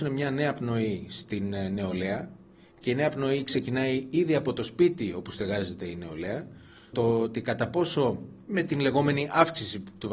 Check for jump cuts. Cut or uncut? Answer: cut